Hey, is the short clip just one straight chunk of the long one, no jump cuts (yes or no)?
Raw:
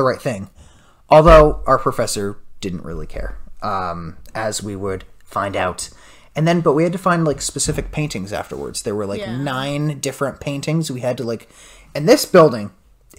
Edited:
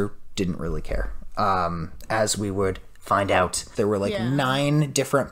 no